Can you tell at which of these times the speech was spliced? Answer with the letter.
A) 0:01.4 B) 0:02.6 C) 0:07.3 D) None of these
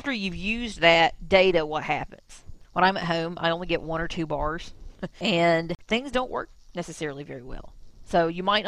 B